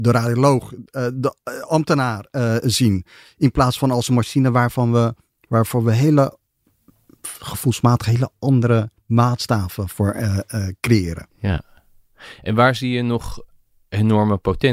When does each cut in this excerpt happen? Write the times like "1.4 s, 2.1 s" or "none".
none